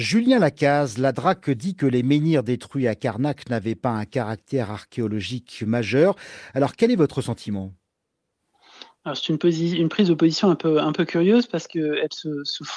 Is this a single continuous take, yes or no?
yes